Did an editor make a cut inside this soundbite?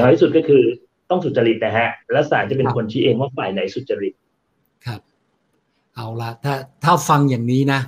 no; 0 cuts

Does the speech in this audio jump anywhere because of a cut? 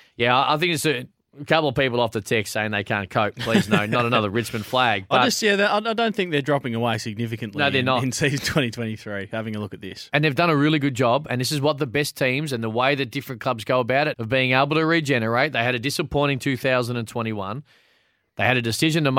yes; 1 cut; at 14.1 s

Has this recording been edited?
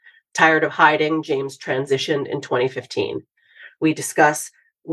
yes; 1 cut; at 3.8 s

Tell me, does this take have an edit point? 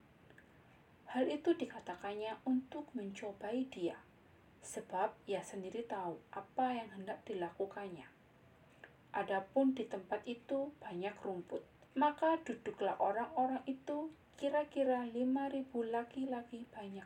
yes; 2 cuts; at 9.0 s, 11.9 s

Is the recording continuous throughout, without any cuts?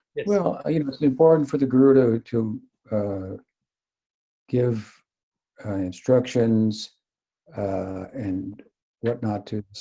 yes; 0 cuts

